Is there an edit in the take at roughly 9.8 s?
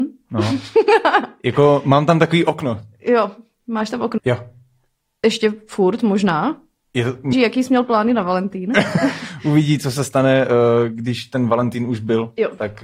no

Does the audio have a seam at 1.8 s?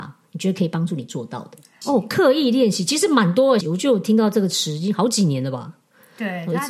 yes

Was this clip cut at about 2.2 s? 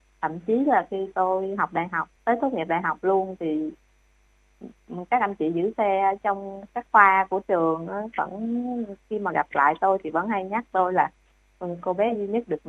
yes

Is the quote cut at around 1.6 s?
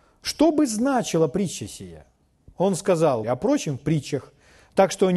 no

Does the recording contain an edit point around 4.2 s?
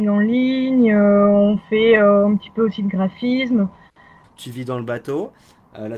yes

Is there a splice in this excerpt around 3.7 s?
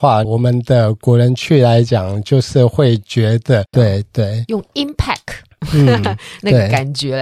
yes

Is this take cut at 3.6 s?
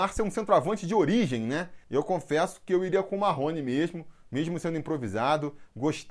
no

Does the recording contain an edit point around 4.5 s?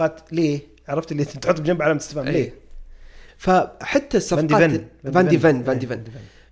no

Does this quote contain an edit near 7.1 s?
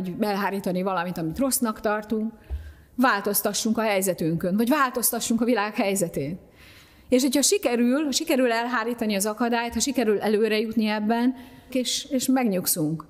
no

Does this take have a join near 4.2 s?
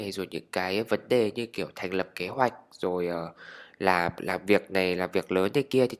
yes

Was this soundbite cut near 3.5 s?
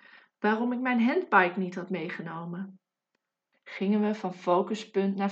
yes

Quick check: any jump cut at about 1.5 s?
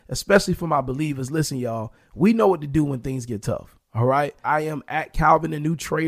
no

